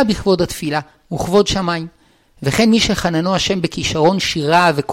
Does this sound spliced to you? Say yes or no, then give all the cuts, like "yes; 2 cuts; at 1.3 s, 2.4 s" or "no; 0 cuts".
no; 0 cuts